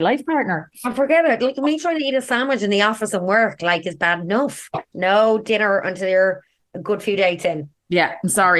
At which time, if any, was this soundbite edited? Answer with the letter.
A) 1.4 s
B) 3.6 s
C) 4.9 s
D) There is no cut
C